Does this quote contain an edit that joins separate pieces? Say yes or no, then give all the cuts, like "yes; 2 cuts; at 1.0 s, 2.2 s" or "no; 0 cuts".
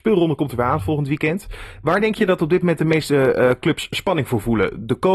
no; 0 cuts